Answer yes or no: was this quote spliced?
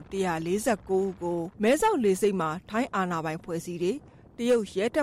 yes